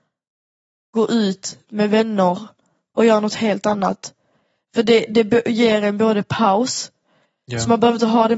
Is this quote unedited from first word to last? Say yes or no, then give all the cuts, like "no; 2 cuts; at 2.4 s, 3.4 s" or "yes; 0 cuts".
yes; 0 cuts